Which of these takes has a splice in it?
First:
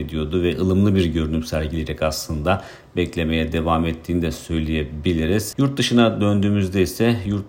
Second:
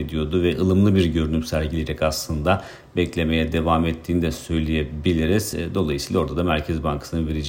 first; 1 cut; at 5.5 s

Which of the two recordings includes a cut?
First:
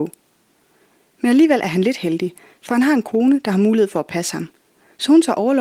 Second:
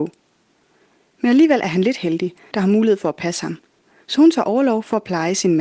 second; 1 cut; at 2.5 s

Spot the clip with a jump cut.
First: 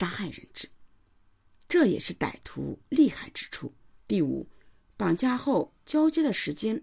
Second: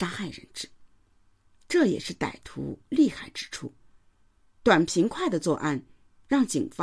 first; 1 cut; at 4.0 s

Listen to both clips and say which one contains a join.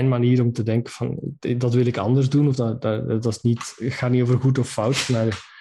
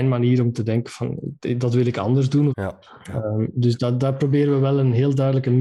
second; 1 cut; at 2.5 s

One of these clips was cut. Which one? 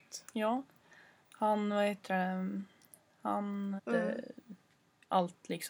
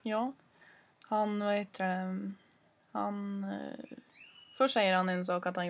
first; 1 cut; at 3.8 s

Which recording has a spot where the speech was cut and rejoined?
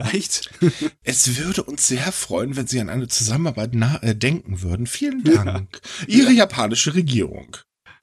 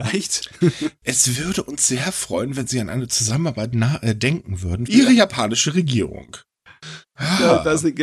second; 1 cut; at 4.9 s

